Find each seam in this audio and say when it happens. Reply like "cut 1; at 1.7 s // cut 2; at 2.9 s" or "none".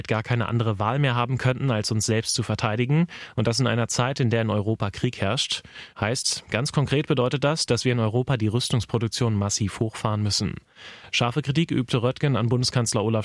cut 1; at 5.9 s